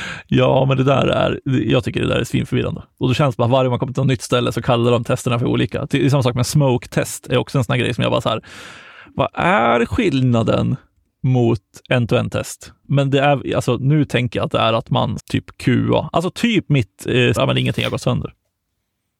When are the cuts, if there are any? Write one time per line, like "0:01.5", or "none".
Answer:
0:12.8
0:15.2
0:17.4